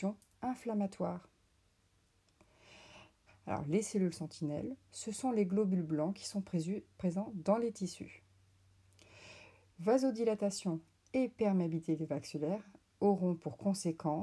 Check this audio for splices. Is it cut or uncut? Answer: cut